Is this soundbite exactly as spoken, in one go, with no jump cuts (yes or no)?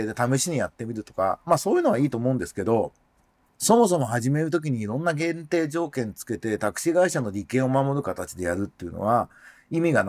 yes